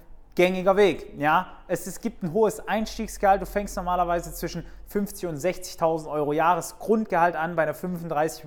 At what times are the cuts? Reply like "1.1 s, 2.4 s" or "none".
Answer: none